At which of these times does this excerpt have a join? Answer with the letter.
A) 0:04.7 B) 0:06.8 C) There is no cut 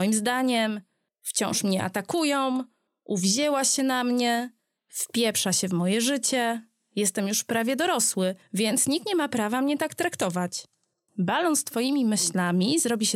A